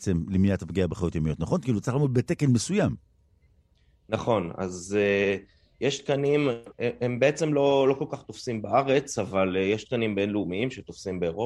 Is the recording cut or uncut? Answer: uncut